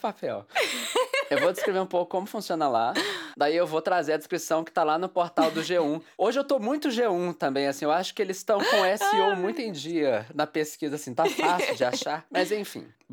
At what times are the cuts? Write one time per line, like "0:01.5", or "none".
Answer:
0:03.3

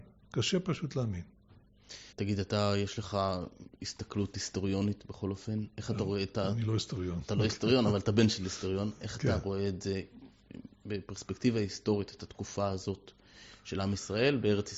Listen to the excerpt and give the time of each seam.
0:02.1

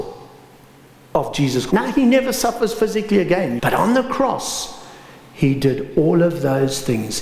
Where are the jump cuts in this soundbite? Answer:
0:01.7
0:03.6

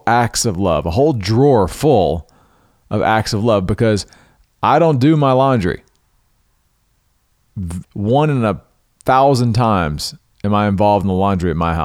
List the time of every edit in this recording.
0:07.8

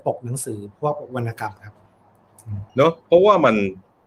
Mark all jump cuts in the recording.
0:02.7

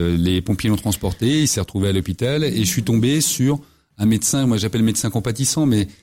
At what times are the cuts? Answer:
none

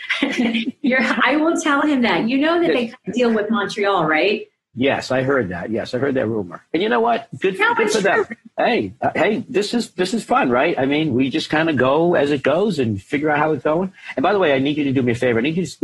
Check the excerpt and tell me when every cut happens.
0:08.5

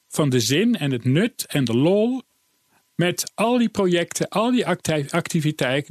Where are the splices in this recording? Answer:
none

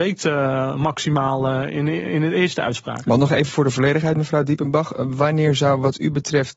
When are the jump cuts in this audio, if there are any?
none

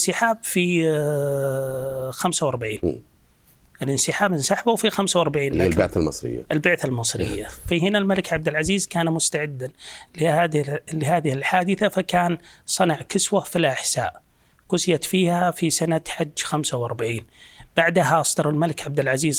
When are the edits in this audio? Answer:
none

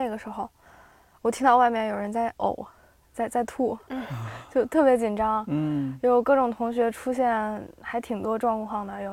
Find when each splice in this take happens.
none

